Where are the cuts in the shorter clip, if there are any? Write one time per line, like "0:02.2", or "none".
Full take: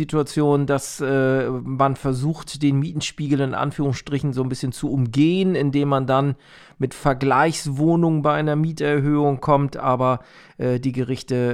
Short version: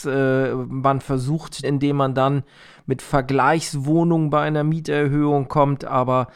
0:01.6